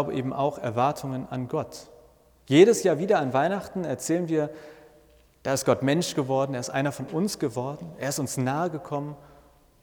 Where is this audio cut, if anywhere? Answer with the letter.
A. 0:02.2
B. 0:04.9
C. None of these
C